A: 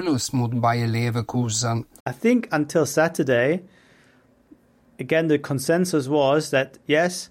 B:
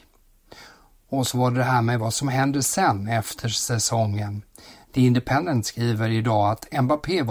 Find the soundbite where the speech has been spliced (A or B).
A